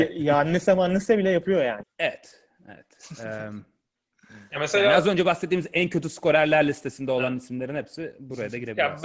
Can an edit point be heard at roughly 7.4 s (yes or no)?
no